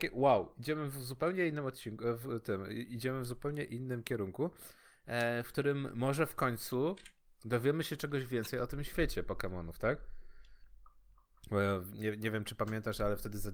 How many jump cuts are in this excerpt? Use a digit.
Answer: 0